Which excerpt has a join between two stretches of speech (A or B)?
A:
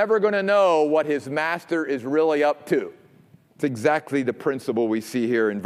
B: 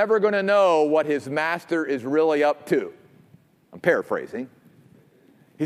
A